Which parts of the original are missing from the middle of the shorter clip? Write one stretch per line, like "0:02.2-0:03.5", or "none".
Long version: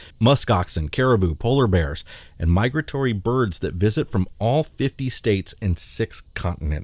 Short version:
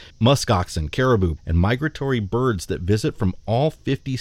0:01.4-0:02.3